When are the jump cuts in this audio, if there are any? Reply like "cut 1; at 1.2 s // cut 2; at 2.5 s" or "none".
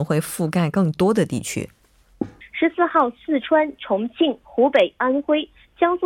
cut 1; at 2.4 s